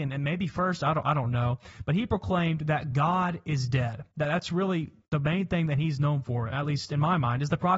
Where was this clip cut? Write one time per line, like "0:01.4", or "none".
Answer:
none